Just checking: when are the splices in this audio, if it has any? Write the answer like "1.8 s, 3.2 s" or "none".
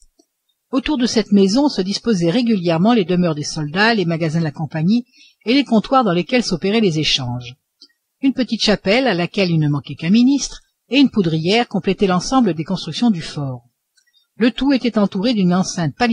none